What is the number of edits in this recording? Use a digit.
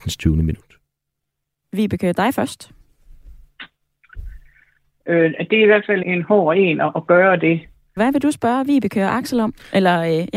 2